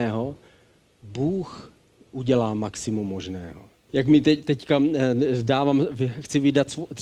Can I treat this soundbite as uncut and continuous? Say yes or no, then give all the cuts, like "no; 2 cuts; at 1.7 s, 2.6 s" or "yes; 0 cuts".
no; 1 cut; at 3.9 s